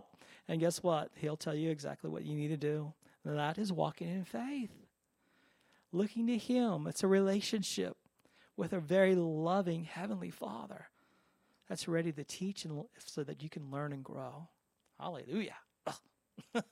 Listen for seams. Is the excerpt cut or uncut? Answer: cut